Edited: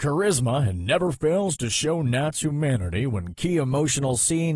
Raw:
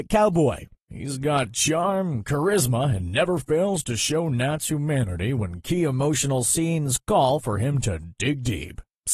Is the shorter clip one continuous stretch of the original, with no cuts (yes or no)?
yes